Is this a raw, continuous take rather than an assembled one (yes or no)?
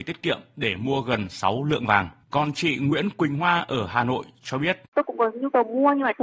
no